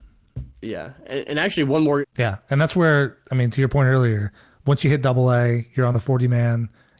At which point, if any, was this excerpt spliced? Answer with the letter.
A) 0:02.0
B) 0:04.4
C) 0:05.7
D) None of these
A